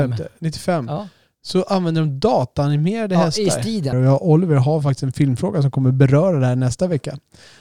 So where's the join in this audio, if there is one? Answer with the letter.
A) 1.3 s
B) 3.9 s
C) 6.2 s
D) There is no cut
B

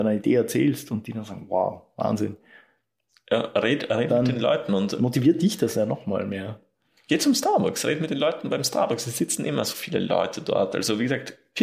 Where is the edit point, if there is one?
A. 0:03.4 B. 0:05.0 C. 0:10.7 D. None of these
D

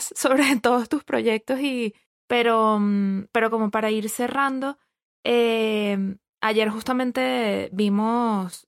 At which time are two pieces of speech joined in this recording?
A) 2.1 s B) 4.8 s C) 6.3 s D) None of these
A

